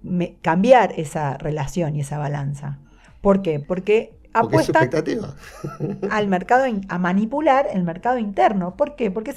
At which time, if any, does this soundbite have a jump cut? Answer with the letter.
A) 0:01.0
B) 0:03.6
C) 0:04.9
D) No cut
B